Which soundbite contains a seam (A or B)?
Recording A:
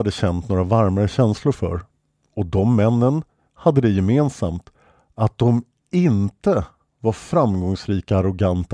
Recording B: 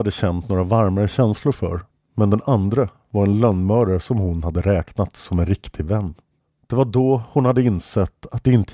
B